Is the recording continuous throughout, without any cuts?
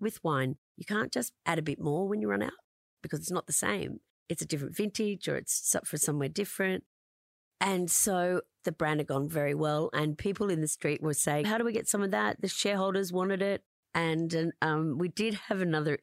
no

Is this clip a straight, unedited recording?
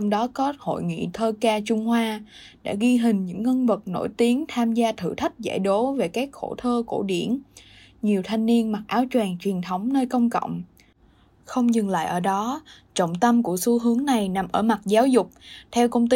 yes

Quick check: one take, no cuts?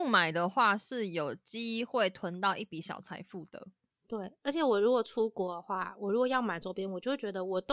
yes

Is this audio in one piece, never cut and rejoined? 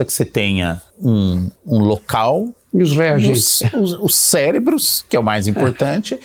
no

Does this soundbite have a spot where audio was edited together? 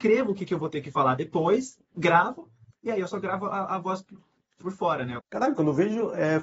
yes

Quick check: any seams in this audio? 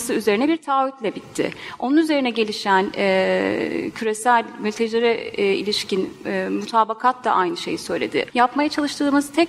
yes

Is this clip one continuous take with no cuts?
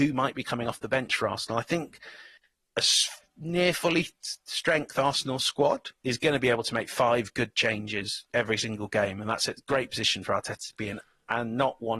yes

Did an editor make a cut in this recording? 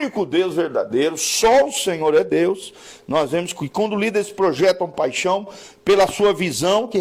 no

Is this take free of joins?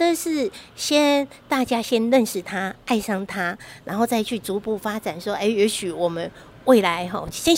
yes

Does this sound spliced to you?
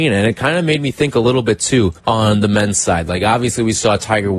yes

